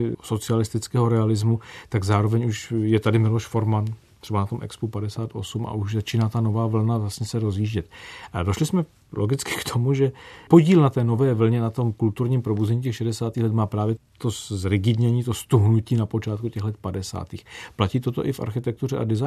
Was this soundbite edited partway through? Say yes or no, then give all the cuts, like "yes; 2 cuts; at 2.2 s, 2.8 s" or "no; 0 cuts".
no; 0 cuts